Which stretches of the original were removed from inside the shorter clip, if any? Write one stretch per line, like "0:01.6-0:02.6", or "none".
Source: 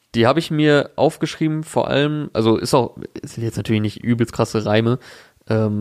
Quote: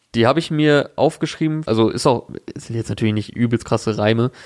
0:01.6-0:02.3